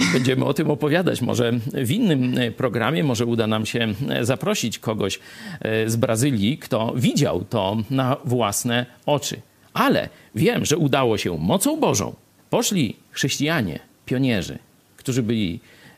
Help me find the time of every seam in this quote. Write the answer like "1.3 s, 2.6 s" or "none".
12.4 s